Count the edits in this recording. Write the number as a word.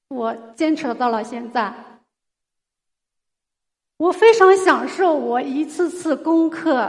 zero